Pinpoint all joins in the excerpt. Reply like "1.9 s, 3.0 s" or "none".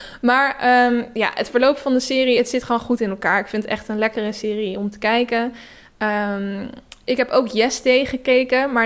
none